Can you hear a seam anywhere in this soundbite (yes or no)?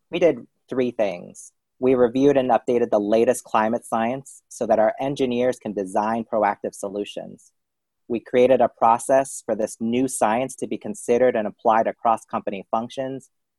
no